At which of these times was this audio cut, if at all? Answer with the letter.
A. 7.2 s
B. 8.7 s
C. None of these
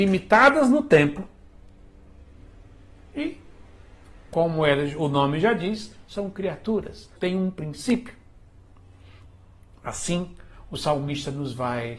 A